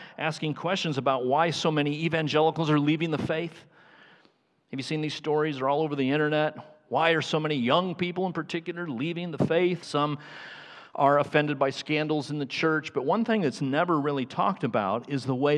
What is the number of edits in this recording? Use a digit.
1